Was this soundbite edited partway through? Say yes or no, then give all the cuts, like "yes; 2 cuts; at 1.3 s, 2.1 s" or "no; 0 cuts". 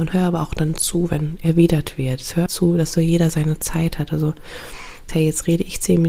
yes; 2 cuts; at 2.5 s, 5.1 s